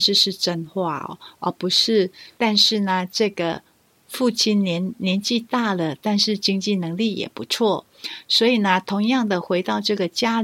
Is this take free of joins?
no; 1 cut; at 2.4 s

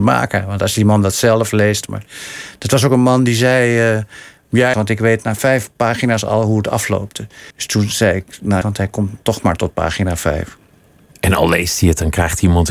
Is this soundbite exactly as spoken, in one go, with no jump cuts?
no; 3 cuts; at 4.7 s, 7.5 s, 8.6 s

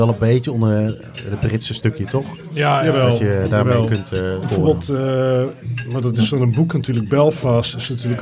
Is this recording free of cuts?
no; 1 cut; at 4.4 s

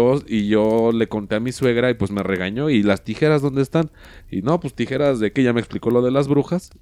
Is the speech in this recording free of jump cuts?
no; 1 cut; at 4.2 s

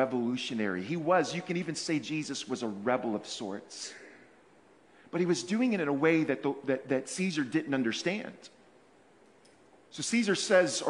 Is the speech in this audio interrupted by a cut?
no; 0 cuts

